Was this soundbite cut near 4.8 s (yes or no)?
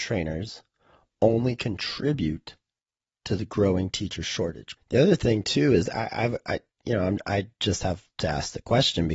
yes